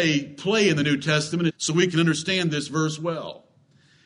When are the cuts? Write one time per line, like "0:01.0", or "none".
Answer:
0:01.5